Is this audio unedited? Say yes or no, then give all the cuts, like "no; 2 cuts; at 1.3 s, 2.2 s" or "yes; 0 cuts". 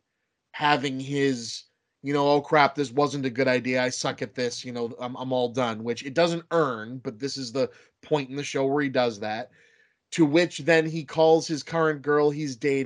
yes; 0 cuts